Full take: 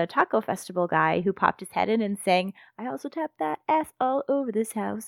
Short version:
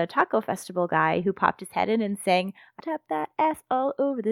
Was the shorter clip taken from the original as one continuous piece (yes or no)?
no